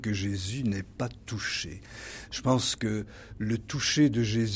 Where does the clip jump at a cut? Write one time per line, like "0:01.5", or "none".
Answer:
none